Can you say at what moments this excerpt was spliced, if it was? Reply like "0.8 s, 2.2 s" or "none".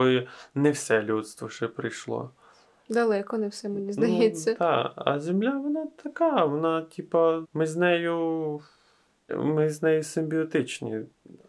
7.4 s, 9.3 s